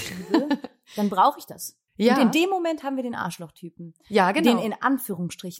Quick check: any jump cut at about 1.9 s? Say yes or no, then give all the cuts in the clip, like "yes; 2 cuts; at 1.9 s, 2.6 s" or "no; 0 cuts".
yes; 1 cut; at 1.9 s